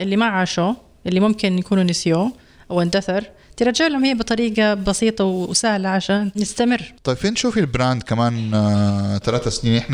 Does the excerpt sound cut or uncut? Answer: uncut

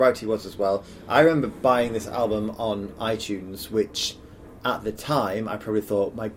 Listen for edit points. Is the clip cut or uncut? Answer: uncut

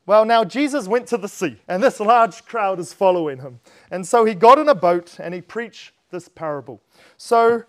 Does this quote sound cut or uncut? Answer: cut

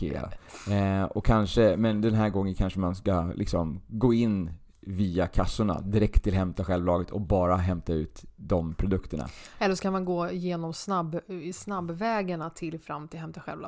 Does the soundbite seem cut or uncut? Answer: uncut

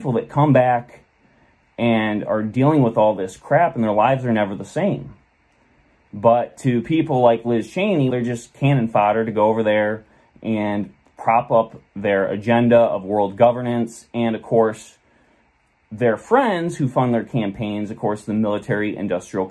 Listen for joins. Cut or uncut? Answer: cut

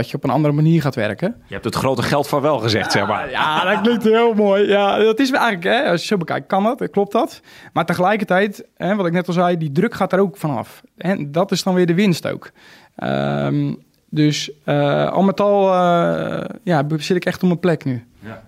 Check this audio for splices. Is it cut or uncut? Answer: uncut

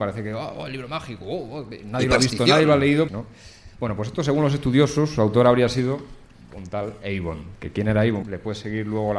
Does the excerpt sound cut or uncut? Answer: cut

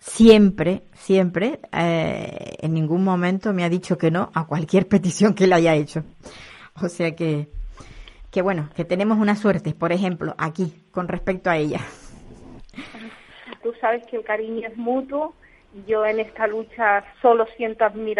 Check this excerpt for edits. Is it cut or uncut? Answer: cut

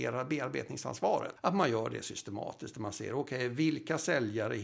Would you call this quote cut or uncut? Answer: cut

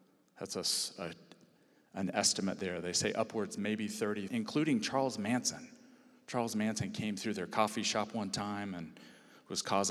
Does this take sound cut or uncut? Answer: cut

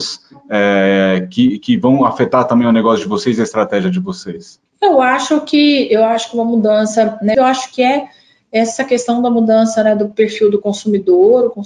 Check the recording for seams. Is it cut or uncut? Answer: cut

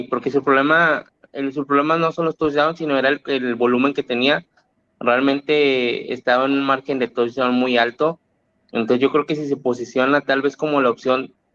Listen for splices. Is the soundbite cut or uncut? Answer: uncut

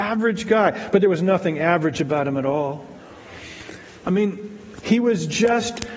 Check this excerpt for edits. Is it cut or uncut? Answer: cut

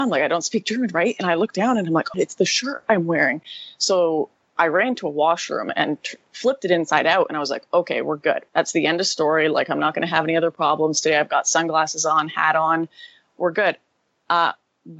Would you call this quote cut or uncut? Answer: cut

